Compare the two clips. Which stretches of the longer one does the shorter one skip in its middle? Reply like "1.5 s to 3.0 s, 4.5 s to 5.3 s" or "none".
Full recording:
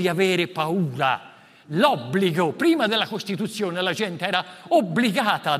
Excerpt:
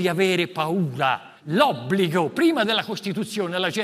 1.4 s to 1.6 s